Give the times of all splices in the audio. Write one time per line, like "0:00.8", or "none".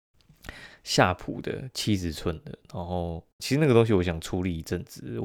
0:03.4